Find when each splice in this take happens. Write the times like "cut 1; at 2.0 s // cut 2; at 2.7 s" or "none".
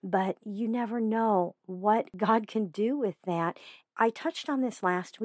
cut 1; at 3.8 s